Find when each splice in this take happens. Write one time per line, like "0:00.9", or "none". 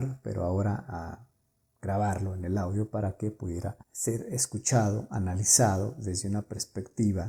0:03.8